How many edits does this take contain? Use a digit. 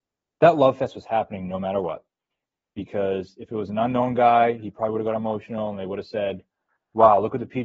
0